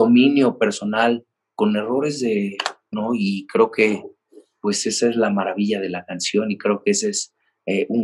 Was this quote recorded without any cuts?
no; 1 cut; at 2.9 s

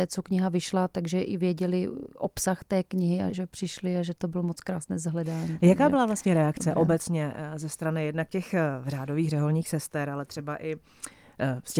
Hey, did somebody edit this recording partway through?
yes; 1 cut; at 3.3 s

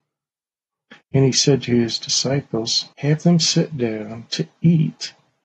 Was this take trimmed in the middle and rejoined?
yes; 2 cuts; at 1.0 s, 2.9 s

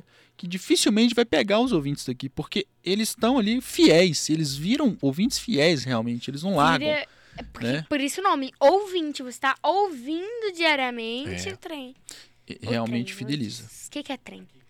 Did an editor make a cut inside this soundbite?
no; 0 cuts

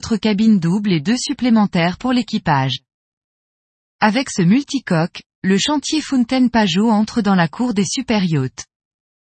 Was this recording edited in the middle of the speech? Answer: no; 0 cuts

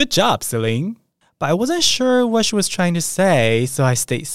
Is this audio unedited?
no; 1 cut; at 1.2 s

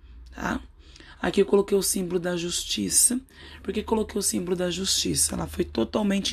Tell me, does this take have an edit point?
no; 0 cuts

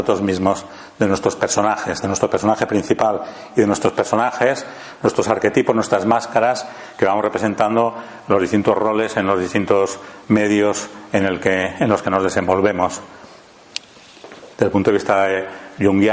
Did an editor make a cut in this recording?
yes; 1 cut; at 14.5 s

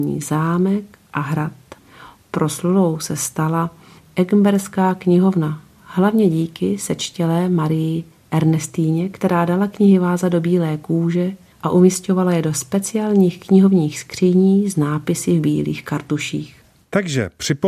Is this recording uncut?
yes; 0 cuts

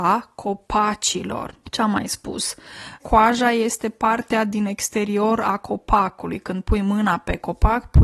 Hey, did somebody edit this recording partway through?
yes; 2 cuts; at 1.6 s, 3.0 s

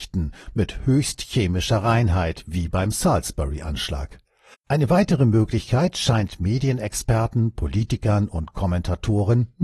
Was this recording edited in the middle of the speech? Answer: yes; 1 cut; at 4.5 s

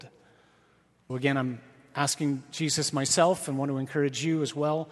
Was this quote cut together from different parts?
yes; 1 cut; at 1.1 s

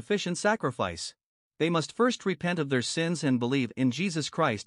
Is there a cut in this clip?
yes; 1 cut; at 1.5 s

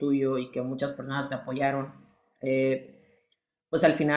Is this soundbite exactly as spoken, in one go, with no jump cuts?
yes; 0 cuts

